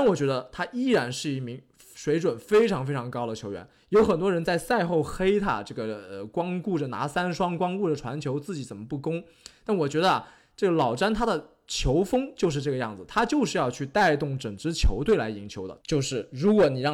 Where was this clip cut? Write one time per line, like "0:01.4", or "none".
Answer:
0:15.8